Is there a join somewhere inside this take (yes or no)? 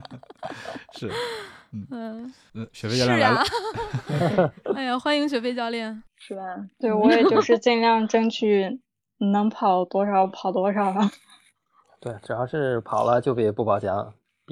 yes